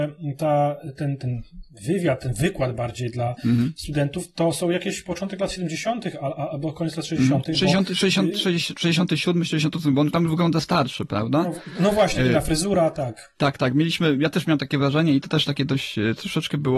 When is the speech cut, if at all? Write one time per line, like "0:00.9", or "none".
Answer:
none